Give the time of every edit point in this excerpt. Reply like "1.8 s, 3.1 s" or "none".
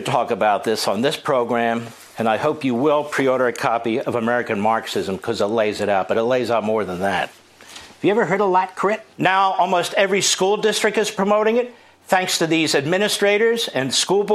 9.1 s